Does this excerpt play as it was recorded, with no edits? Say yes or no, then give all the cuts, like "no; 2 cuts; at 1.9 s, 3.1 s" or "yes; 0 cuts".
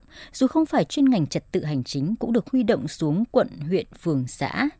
yes; 0 cuts